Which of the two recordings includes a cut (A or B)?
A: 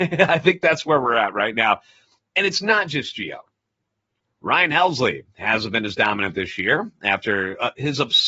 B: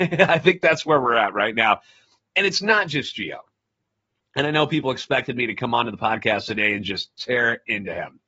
A